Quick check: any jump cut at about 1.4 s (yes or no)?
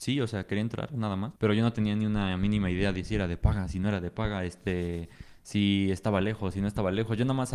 yes